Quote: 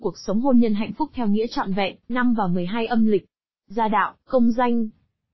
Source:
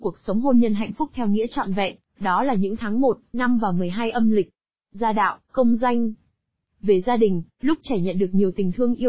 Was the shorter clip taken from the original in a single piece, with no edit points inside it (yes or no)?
no